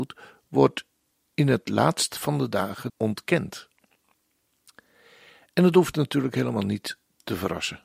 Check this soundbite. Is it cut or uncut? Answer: cut